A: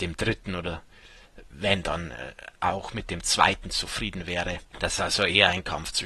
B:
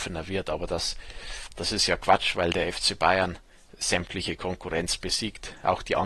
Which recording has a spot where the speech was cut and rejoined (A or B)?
A